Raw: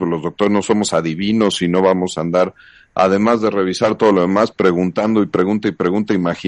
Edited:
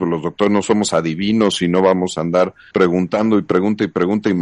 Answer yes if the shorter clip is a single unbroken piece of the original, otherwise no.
no